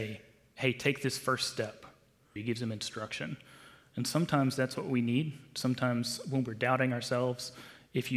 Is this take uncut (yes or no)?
no